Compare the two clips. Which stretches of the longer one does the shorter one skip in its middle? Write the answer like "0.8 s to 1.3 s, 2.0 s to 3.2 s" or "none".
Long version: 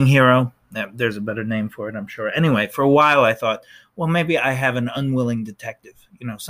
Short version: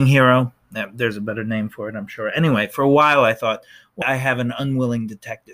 4.0 s to 4.4 s